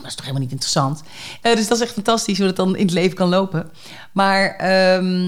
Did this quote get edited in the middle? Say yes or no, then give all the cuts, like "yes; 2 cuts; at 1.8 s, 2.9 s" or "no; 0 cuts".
yes; 1 cut; at 1.4 s